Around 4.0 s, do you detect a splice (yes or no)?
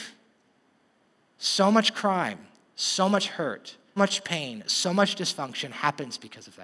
yes